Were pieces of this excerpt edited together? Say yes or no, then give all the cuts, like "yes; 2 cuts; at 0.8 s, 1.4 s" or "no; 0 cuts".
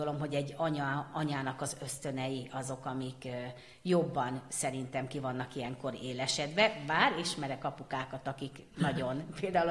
no; 0 cuts